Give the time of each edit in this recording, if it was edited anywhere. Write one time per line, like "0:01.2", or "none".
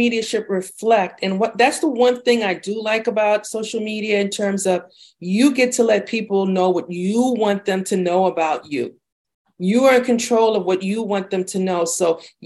none